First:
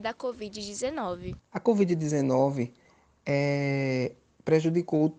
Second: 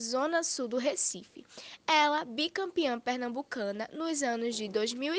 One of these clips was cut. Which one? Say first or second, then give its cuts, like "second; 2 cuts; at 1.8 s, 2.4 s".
first; 1 cut; at 1.4 s